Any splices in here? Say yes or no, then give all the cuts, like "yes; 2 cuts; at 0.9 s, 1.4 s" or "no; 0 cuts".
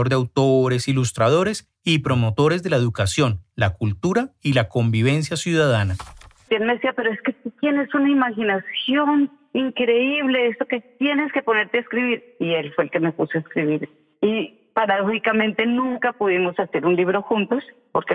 yes; 1 cut; at 6.5 s